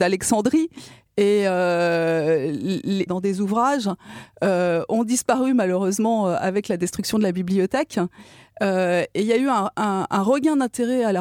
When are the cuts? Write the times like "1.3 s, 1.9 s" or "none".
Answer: 3.1 s